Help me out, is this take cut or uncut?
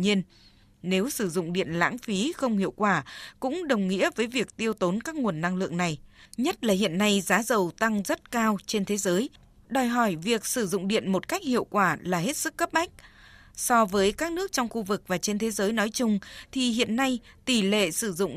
uncut